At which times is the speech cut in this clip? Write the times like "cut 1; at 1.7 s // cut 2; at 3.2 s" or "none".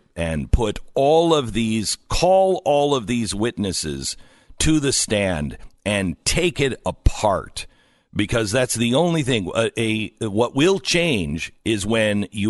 none